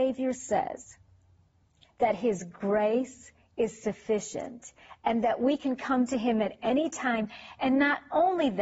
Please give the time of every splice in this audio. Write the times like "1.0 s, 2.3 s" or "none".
none